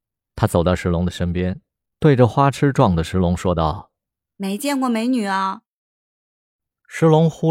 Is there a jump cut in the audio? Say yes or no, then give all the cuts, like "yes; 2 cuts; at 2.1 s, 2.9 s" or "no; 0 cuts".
no; 0 cuts